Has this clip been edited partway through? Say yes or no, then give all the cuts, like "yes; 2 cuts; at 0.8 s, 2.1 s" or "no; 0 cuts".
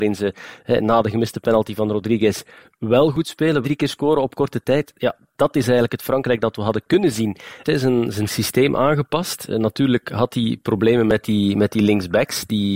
yes; 2 cuts; at 3.6 s, 7.6 s